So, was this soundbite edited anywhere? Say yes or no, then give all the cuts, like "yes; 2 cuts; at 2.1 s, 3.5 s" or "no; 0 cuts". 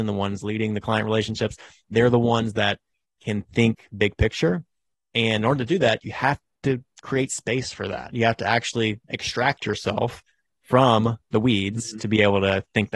no; 0 cuts